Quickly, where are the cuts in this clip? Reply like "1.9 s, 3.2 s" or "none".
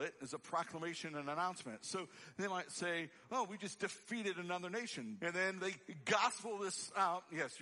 5.2 s